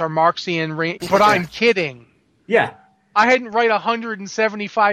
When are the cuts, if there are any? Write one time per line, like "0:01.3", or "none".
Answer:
0:01.0